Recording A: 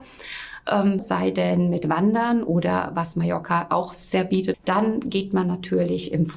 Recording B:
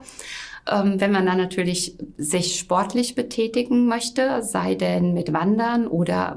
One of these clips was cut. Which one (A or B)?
A